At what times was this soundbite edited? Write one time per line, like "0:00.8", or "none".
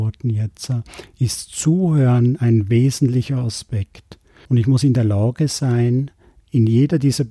0:04.5